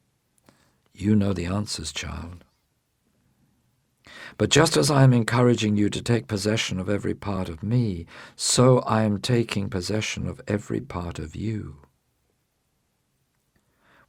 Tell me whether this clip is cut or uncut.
uncut